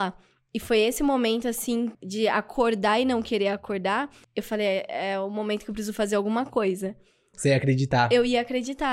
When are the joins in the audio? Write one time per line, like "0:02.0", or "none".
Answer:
0:01.9
0:04.2
0:07.3